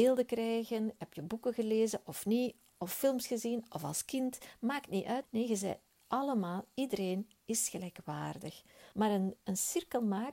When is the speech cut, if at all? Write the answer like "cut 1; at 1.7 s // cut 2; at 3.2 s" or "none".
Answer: cut 1; at 5.2 s // cut 2; at 8.9 s